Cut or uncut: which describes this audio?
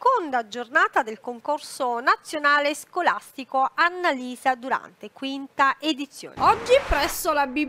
cut